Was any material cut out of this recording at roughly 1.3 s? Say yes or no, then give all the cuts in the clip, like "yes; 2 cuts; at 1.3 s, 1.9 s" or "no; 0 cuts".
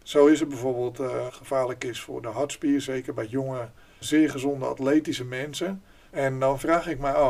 yes; 3 cuts; at 1.3 s, 4.0 s, 6.1 s